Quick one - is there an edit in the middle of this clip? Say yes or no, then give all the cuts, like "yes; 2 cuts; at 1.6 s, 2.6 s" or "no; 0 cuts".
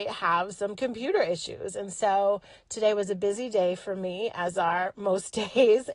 no; 0 cuts